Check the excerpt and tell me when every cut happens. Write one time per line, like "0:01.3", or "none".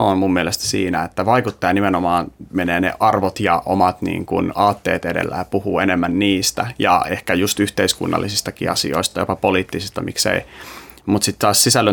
none

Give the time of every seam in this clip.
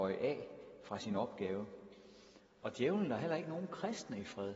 none

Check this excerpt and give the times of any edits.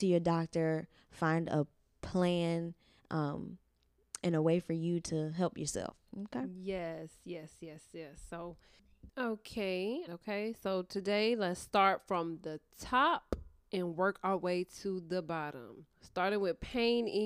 0:10.1
0:15.9

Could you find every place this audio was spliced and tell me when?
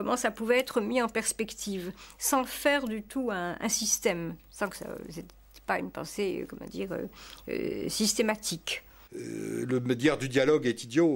0:09.1

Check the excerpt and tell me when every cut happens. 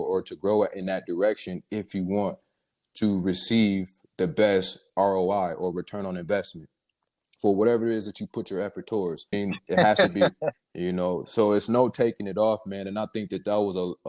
0:09.3
0:10.5

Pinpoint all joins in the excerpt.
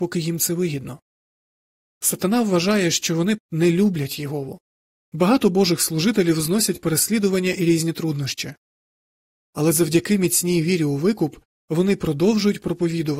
0:03.4
0:05.0

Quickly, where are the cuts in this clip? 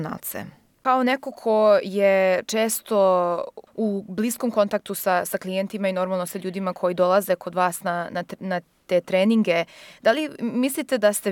none

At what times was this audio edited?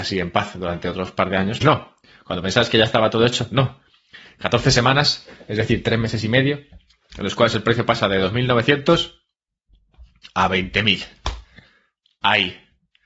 0:01.6

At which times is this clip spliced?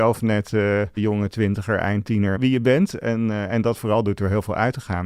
0:01.0
0:02.4

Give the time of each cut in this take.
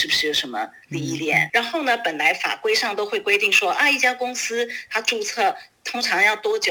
0:01.5

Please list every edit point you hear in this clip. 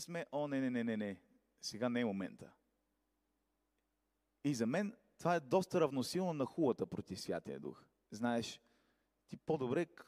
0:08.1

